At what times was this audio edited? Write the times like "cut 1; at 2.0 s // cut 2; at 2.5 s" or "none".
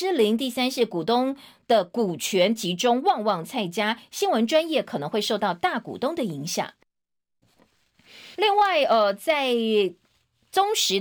cut 1; at 8.3 s